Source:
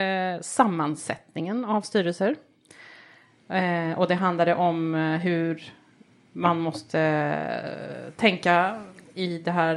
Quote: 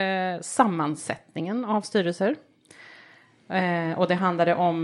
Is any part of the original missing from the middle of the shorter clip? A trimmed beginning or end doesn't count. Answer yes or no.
no